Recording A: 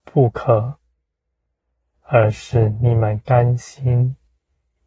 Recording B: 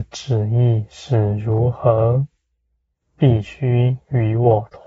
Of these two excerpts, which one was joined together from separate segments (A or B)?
B